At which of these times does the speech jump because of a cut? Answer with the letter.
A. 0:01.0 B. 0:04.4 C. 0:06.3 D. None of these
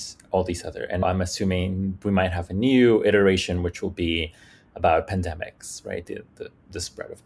A